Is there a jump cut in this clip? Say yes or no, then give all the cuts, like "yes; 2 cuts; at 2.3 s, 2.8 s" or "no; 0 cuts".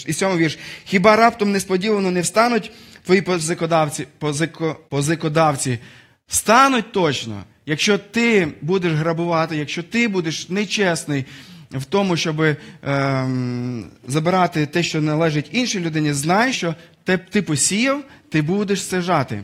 yes; 2 cuts; at 4.9 s, 16.5 s